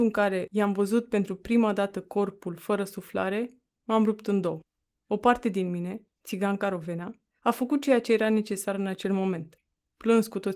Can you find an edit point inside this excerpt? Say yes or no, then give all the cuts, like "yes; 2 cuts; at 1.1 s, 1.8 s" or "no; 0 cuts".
no; 0 cuts